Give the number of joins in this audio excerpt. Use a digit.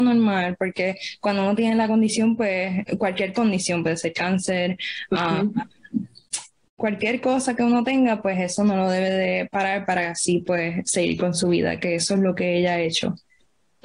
1